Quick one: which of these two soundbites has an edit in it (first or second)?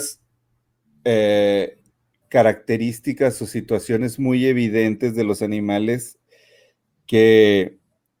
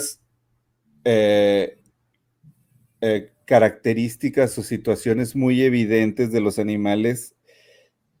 first